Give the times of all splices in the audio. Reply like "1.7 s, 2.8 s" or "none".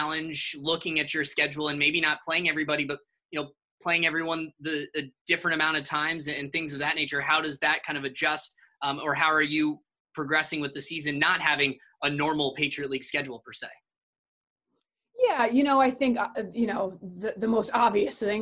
none